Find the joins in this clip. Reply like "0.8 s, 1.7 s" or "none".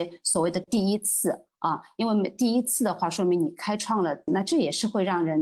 4.3 s